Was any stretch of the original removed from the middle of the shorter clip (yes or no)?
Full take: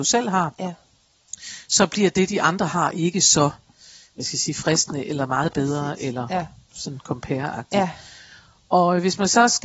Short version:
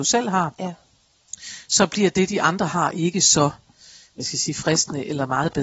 no